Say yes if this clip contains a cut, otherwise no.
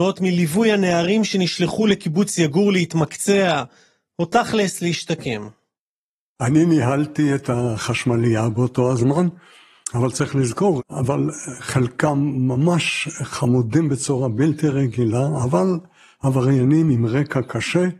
yes